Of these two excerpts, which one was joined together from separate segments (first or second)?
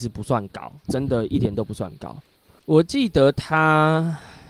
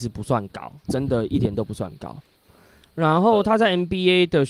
first